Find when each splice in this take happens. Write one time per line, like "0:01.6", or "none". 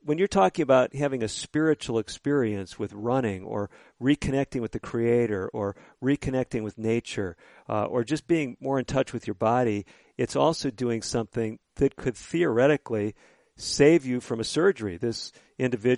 none